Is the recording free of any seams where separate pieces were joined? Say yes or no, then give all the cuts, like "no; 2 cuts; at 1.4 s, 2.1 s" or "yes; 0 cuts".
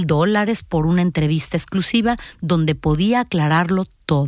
yes; 0 cuts